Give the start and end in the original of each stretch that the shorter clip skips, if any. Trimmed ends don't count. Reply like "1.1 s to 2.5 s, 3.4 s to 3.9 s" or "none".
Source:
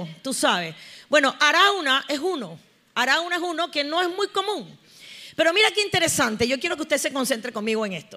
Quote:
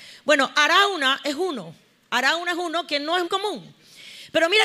4.1 s to 4.3 s